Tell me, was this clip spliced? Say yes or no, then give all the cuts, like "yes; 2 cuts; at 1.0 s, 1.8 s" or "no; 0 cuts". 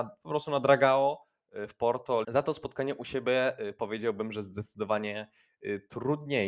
yes; 1 cut; at 2.2 s